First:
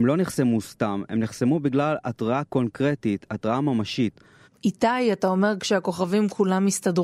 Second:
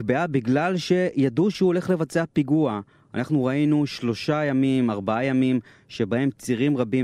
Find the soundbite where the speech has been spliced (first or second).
first